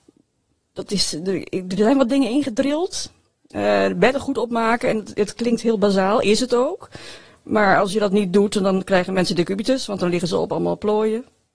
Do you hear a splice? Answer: no; 0 cuts

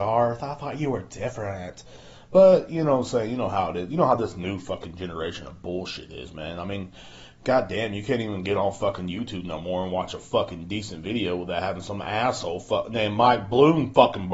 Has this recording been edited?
no; 0 cuts

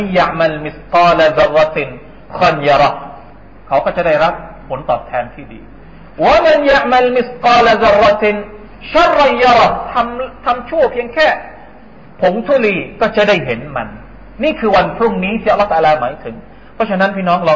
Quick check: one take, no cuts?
no; 1 cut; at 2.4 s

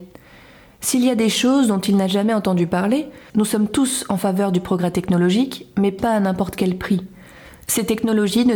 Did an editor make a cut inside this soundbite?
yes; 1 cut; at 3.3 s

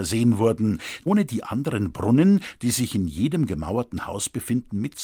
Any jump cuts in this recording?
no; 0 cuts

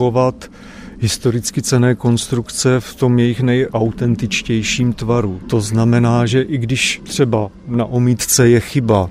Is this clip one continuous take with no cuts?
yes; 0 cuts

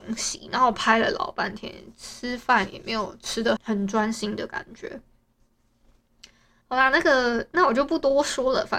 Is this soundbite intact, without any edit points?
no; 2 cuts; at 3.6 s, 6.6 s

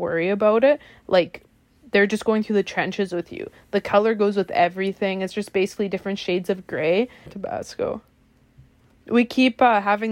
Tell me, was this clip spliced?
yes; 1 cut; at 7.3 s

